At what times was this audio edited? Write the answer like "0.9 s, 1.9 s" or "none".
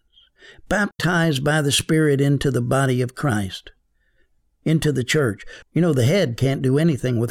5.6 s